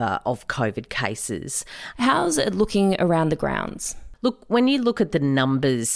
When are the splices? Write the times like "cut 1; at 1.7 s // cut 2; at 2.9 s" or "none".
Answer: cut 1; at 1.9 s